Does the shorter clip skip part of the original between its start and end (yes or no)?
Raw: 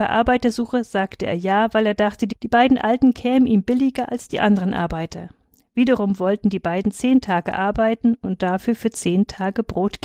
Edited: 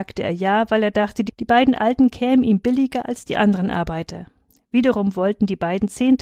no